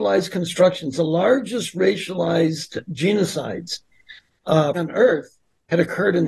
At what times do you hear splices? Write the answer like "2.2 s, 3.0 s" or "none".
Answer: 4.7 s